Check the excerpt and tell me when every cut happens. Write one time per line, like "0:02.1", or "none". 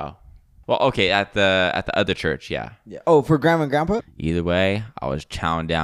0:04.0